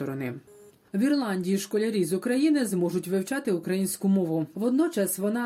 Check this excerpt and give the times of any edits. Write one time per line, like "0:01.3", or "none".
0:04.5

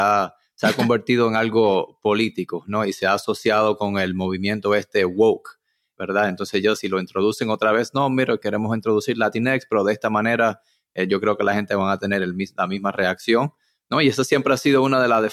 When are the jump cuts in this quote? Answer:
none

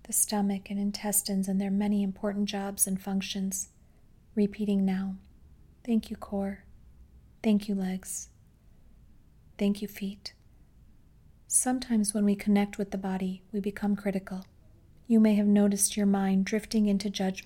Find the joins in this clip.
0:07.3

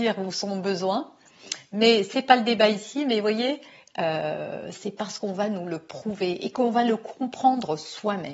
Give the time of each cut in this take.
0:04.7

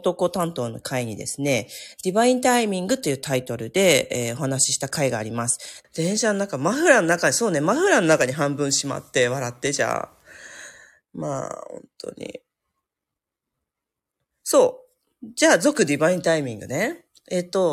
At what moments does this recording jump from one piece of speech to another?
0:05.8

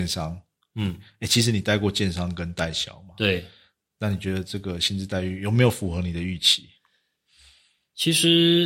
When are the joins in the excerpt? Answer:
none

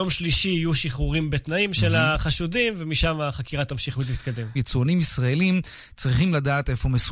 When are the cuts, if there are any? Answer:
0:04.6

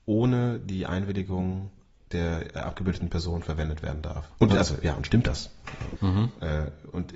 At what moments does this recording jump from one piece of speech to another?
0:04.3
0:06.0

